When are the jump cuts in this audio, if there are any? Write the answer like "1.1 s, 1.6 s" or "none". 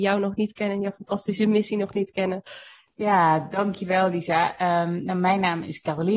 2.9 s